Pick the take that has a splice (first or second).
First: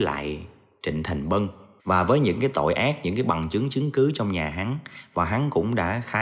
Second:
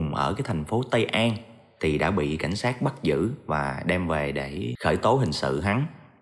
first